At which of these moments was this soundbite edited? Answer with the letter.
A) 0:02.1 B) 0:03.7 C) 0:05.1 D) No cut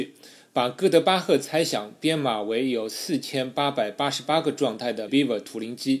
C